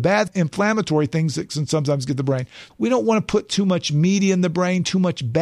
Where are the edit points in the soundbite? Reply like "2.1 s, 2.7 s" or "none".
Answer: 2.7 s

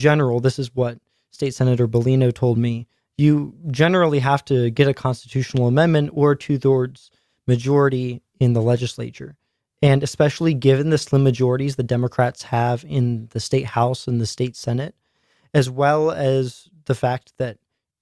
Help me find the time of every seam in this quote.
none

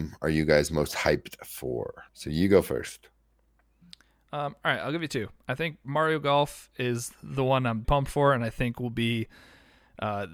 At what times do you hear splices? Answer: 2.1 s, 7.8 s

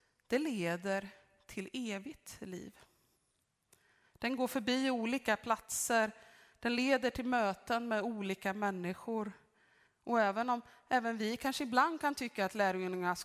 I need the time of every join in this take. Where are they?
4.0 s, 9.9 s

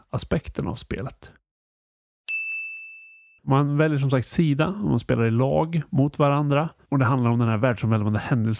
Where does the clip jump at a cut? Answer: 3.4 s

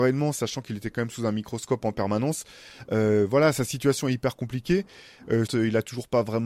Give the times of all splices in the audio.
5.5 s

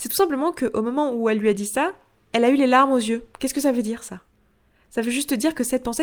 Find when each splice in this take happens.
3.3 s

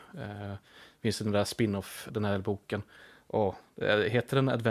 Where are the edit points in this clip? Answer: 2.1 s

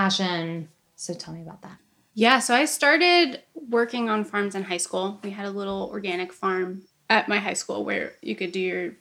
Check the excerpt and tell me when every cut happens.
none

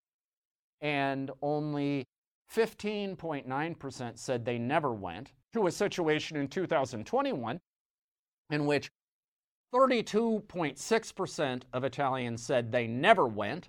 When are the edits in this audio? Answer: 5.4 s

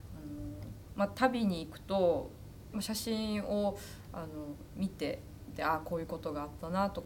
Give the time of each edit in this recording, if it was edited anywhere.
2.7 s

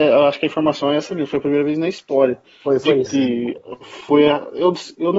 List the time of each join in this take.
3.1 s

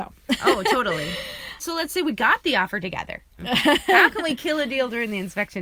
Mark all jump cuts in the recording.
1.6 s, 3.4 s

